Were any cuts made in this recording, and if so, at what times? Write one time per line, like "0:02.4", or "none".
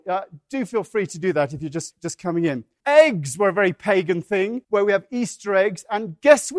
0:02.8
0:04.6